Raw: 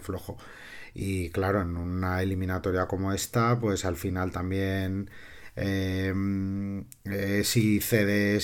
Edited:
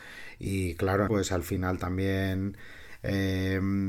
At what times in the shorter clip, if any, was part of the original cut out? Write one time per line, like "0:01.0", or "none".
0:01.1